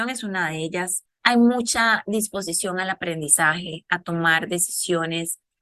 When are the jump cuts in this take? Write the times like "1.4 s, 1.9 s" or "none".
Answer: 1.1 s